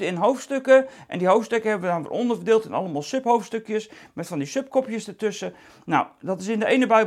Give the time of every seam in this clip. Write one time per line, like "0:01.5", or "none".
none